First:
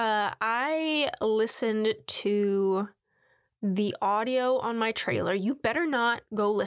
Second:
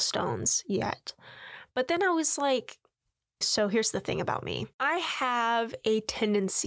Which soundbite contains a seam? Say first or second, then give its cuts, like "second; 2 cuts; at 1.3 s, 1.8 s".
second; 2 cuts; at 3.4 s, 4.7 s